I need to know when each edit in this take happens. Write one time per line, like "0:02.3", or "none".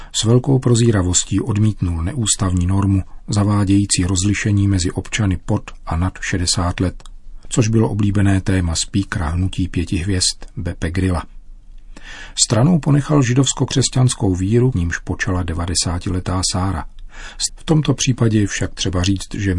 0:14.7
0:17.5